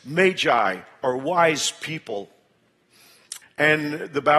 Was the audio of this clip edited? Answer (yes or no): yes